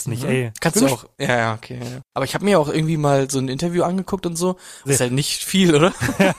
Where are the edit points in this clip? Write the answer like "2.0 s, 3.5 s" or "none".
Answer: 1.1 s, 4.9 s